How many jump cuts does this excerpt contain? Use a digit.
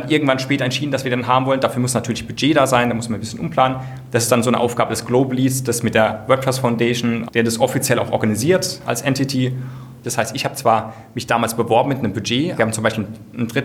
3